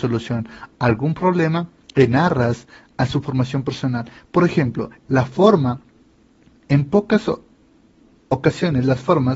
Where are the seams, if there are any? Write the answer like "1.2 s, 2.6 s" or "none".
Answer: 5.0 s